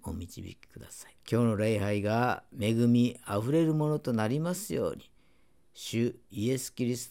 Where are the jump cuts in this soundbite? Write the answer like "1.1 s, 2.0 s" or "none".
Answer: 1.2 s